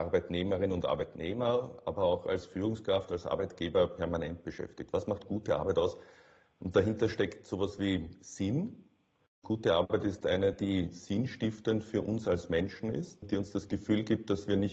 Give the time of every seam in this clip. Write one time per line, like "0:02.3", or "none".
none